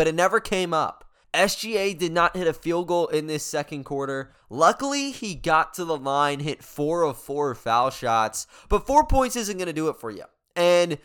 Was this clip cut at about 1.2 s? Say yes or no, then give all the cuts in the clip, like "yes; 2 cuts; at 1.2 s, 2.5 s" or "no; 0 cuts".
yes; 1 cut; at 1.2 s